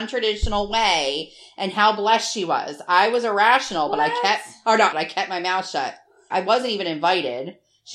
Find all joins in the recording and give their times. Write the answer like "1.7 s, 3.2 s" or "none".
4.9 s, 6.3 s